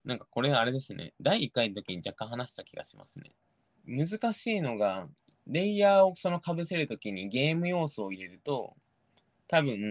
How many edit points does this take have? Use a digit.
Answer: 1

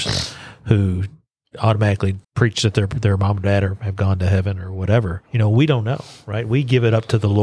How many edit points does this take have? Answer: 2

